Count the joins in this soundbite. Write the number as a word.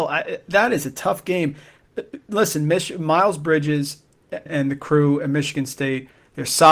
one